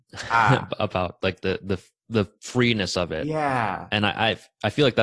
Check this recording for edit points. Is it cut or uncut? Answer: cut